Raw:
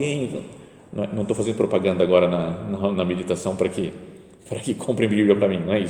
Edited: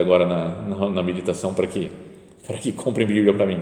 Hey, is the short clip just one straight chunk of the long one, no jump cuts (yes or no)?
yes